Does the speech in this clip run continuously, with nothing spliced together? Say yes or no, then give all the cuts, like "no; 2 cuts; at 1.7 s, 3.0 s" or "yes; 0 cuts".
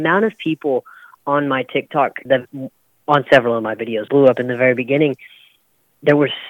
no; 2 cuts; at 2.3 s, 4.1 s